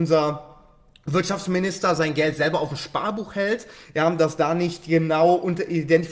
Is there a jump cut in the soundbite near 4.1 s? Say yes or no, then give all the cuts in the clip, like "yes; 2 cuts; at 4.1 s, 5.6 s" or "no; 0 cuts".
no; 0 cuts